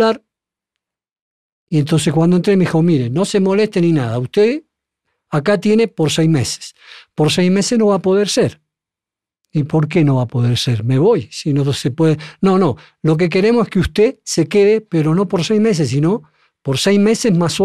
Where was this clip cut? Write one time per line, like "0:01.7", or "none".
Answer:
none

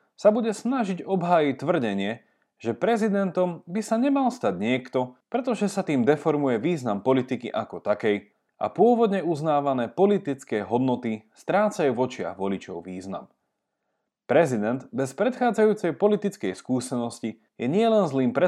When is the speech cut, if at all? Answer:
0:05.2

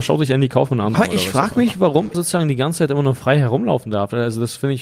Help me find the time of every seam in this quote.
0:00.9
0:02.1

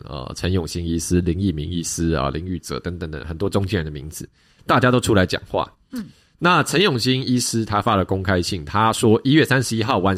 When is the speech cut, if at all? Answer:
none

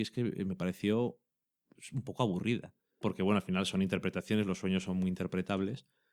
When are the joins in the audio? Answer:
0:03.0

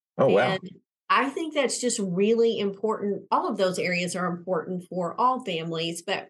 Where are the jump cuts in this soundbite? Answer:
none

